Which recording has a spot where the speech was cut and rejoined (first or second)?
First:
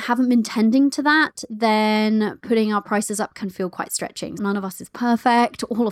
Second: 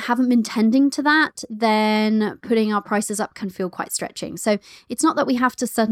first